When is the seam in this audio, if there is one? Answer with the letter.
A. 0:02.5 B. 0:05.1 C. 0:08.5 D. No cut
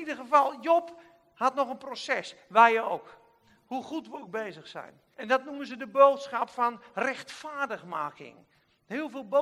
B